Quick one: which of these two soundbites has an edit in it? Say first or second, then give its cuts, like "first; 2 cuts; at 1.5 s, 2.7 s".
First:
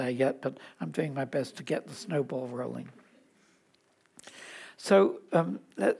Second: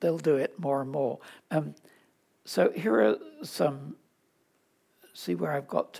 second; 1 cut; at 1.4 s